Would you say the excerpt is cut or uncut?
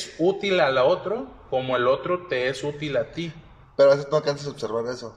uncut